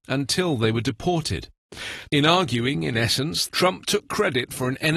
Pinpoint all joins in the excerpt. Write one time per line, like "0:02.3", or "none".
0:02.0
0:03.5

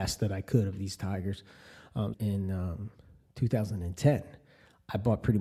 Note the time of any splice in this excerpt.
0:02.1

